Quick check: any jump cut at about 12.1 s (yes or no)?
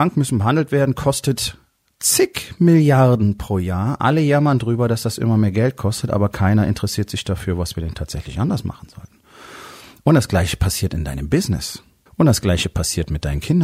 yes